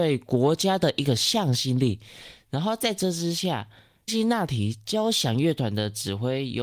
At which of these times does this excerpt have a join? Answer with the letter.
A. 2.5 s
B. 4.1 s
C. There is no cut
B